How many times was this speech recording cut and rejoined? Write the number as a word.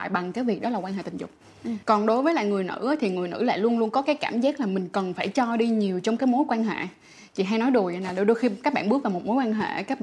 one